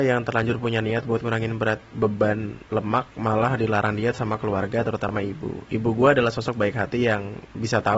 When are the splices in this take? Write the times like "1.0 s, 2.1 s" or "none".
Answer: none